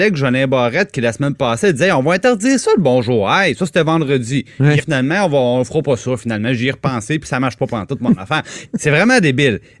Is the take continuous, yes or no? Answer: no